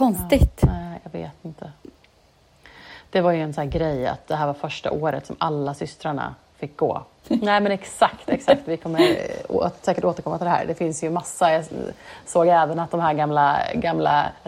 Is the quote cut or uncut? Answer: cut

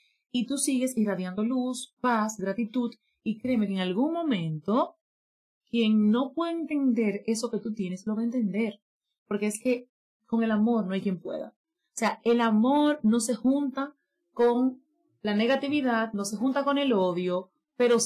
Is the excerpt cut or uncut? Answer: uncut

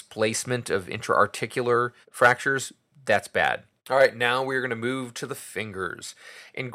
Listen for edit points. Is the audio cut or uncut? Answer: cut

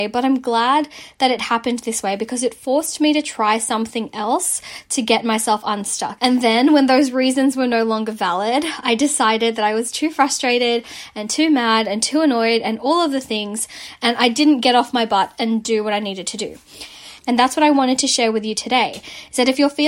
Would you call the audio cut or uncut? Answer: cut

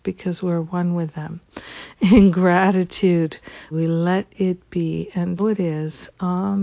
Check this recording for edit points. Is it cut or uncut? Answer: cut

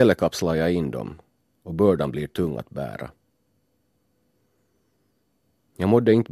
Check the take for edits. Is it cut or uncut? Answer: uncut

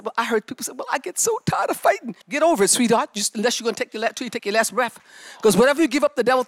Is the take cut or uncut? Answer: cut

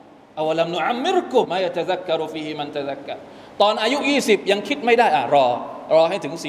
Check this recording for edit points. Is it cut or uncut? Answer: cut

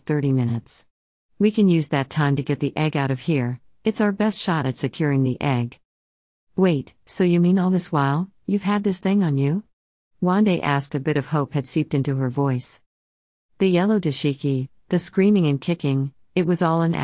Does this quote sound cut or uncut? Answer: uncut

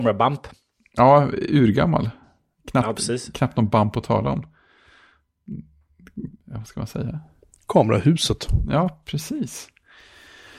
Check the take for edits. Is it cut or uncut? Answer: cut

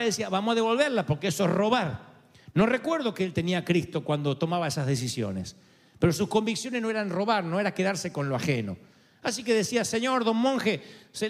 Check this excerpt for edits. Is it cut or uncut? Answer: uncut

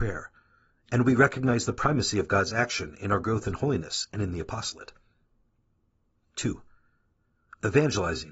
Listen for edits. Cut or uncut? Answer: uncut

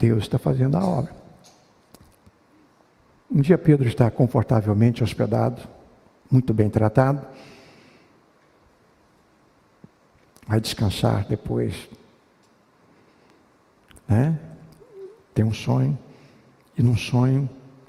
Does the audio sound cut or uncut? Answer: uncut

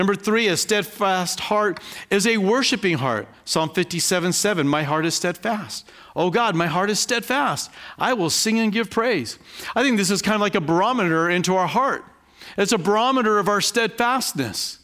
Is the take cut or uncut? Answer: uncut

